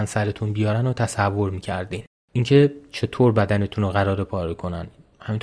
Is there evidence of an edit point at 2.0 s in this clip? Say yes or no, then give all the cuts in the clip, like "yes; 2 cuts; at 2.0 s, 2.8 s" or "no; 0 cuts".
no; 1 cut; at 4.3 s